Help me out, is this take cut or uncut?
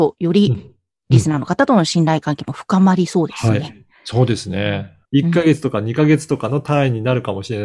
cut